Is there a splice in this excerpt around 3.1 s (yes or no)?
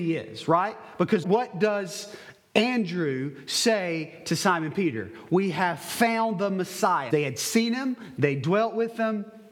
no